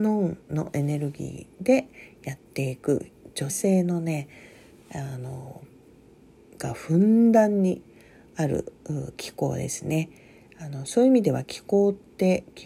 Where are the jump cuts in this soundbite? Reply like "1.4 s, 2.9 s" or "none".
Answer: 3.5 s